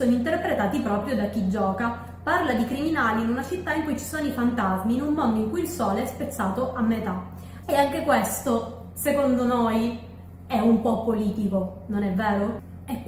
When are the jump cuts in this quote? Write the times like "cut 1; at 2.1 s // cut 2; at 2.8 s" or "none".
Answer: cut 1; at 7.6 s